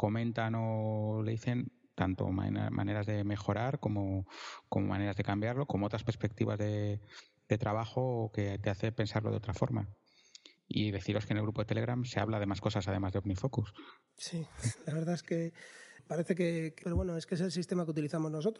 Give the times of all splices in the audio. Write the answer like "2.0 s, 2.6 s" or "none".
5.7 s, 16.8 s